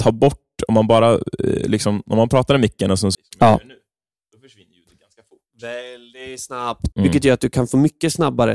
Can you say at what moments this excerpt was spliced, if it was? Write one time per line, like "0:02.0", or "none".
0:03.1
0:06.9